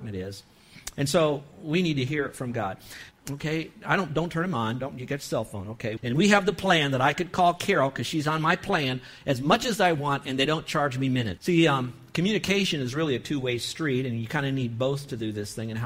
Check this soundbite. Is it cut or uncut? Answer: cut